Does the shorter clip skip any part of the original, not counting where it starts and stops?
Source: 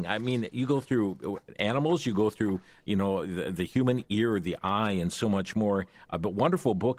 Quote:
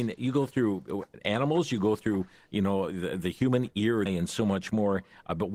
yes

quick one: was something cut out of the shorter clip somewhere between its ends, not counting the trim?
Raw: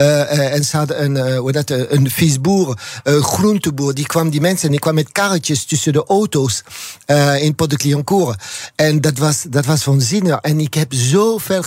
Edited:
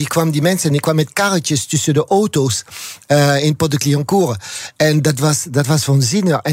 no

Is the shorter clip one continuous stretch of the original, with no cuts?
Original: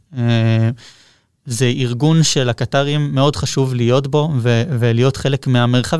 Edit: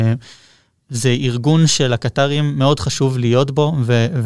yes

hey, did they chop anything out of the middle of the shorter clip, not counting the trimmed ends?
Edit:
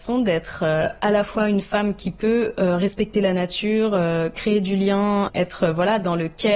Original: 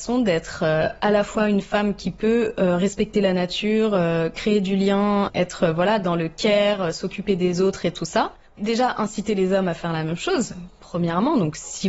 no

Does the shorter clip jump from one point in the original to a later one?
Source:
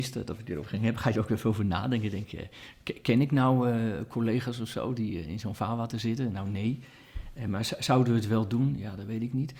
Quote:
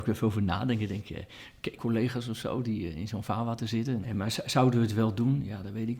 yes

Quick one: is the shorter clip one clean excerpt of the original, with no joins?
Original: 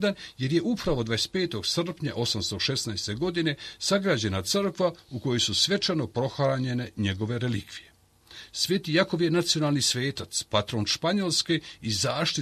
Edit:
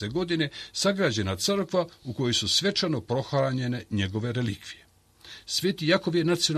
yes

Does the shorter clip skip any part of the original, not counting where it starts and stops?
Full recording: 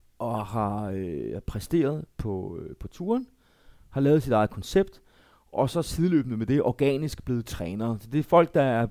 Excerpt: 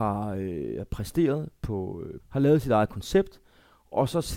yes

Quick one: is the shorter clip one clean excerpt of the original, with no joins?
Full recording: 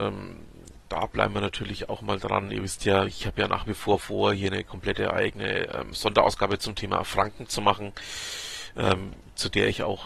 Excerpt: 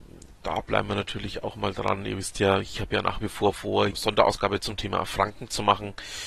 no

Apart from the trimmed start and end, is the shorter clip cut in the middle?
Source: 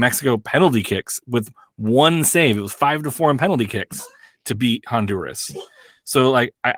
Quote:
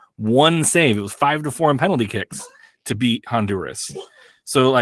no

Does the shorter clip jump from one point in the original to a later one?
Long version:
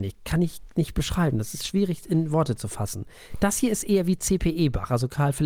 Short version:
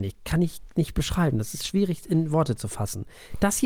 no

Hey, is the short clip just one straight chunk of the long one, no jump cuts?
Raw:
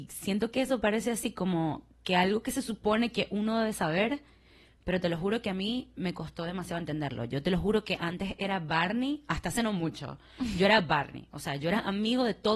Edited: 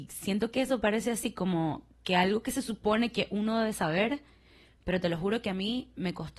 yes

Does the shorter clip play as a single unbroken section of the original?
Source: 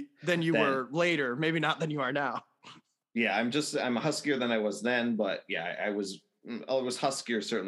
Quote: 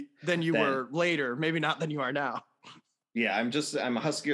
yes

